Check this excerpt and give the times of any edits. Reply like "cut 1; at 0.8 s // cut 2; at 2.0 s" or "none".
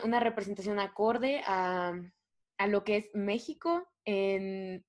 none